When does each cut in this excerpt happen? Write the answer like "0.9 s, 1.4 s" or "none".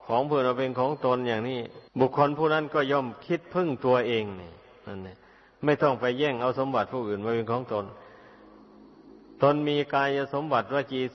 1.9 s